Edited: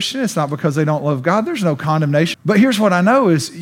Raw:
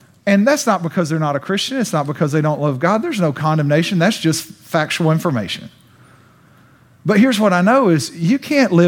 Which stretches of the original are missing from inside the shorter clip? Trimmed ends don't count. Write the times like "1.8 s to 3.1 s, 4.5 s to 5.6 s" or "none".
3.9 s to 6.9 s